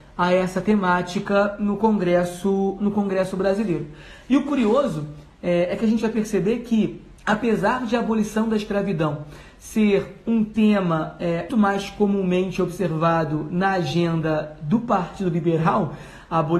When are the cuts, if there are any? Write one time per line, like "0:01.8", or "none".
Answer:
0:07.2
0:11.5